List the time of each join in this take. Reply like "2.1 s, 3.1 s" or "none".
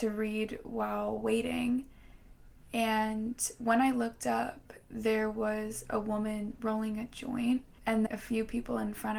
6.6 s, 8.1 s